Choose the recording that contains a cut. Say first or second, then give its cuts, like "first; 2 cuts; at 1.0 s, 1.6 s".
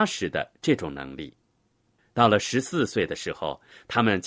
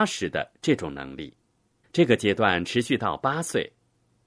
second; 1 cut; at 1.8 s